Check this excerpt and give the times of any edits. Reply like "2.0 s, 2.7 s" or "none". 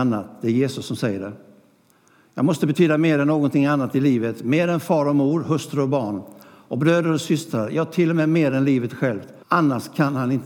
9.4 s